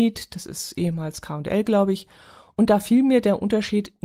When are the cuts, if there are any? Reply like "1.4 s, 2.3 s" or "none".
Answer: none